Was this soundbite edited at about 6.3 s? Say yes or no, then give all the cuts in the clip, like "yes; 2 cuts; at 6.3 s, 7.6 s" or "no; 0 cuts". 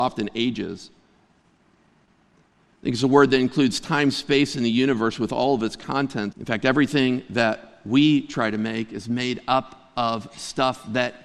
yes; 1 cut; at 6.3 s